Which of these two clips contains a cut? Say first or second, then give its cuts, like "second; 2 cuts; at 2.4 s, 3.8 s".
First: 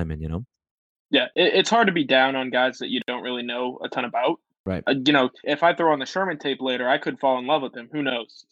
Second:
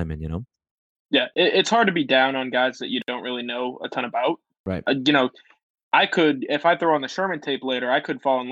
first; 1 cut; at 5.4 s